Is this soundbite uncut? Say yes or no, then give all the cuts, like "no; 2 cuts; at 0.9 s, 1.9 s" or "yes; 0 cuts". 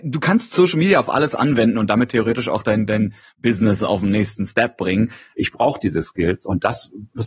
no; 1 cut; at 5.3 s